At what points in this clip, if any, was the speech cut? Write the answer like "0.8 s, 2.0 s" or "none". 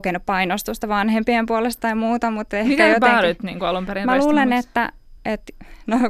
5.2 s